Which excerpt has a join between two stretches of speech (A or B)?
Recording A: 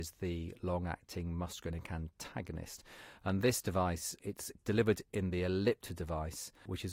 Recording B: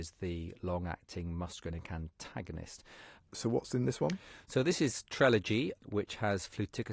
B